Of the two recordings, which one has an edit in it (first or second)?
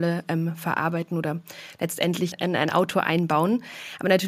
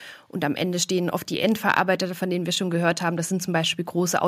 first